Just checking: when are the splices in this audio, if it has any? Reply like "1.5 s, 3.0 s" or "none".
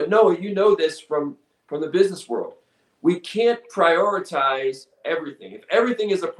none